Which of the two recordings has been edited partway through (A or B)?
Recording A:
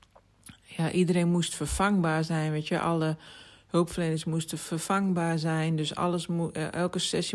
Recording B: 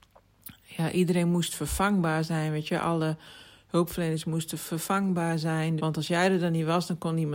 B